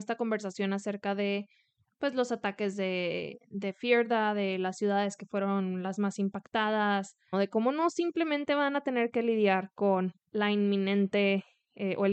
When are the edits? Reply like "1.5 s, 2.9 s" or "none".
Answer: 7.3 s, 10.2 s